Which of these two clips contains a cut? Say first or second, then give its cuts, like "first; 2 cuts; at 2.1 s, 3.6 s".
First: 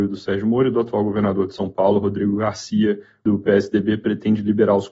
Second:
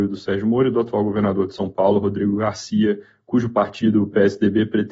first; 1 cut; at 3.3 s